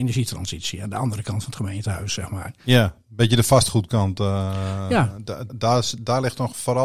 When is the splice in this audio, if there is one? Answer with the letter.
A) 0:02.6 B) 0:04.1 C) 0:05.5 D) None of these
C